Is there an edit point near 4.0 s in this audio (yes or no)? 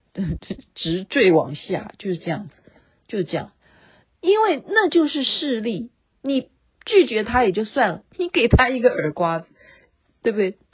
yes